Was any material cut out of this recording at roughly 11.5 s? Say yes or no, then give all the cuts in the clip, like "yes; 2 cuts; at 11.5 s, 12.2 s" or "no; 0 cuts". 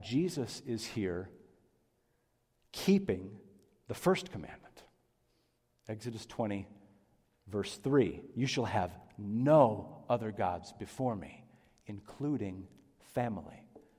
no; 0 cuts